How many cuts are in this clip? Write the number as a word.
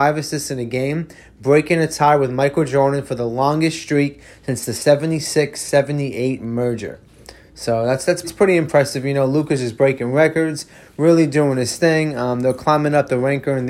one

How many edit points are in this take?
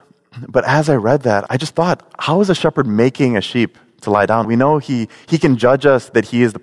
two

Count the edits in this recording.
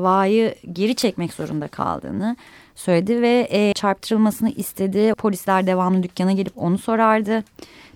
two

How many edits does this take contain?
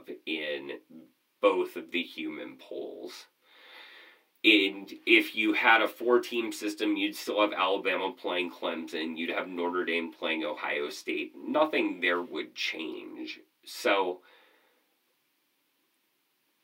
zero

